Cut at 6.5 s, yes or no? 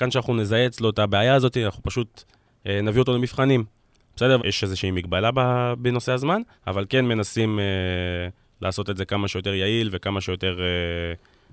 yes